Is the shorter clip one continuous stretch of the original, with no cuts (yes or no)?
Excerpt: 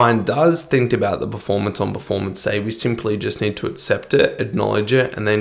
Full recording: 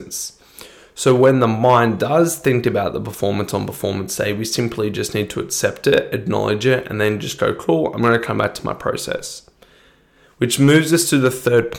yes